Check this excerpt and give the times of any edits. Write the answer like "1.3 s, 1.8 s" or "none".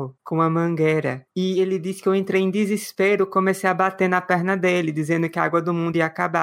none